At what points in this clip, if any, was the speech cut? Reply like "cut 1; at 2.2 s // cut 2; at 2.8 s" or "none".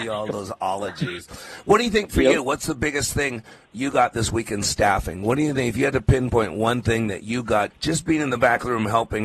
cut 1; at 7.7 s